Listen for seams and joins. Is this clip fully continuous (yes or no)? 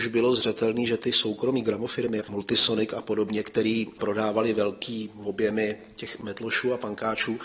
no